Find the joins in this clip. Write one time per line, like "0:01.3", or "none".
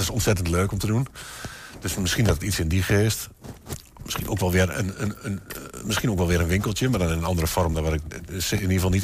none